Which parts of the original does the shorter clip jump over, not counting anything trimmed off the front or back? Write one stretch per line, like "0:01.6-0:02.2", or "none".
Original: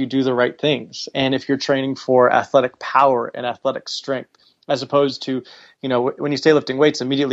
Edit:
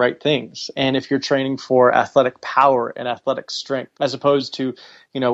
0:04.3-0:04.6